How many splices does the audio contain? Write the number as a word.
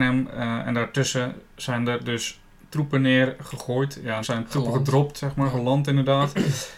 one